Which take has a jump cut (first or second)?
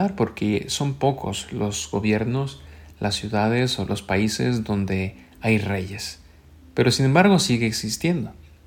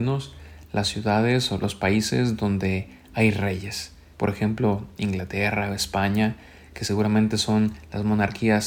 second